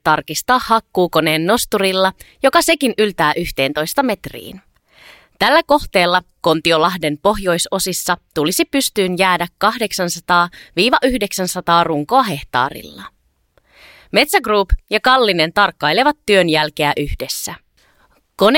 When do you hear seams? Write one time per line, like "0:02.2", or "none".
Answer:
none